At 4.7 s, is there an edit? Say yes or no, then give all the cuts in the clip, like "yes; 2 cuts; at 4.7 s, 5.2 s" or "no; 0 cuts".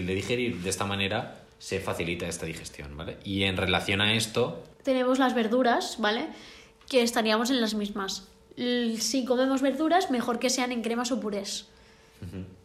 yes; 2 cuts; at 1.5 s, 4.7 s